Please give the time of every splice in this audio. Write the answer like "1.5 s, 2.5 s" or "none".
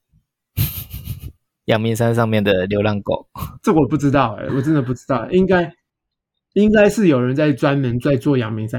none